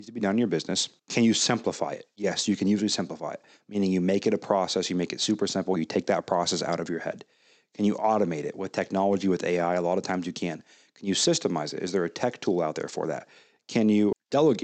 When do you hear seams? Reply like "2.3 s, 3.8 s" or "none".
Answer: none